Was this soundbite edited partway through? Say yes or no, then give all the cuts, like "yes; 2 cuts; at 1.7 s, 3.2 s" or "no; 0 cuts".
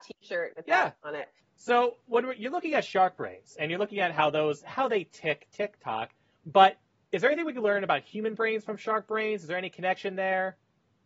no; 0 cuts